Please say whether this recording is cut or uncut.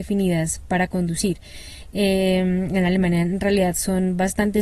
uncut